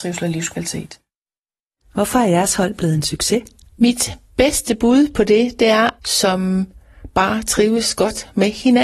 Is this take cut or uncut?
cut